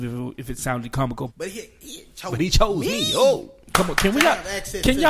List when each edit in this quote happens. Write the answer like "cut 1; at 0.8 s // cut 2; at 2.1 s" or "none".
cut 1; at 1.3 s